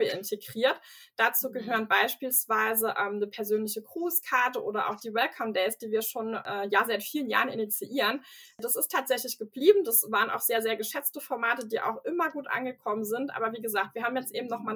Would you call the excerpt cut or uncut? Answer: uncut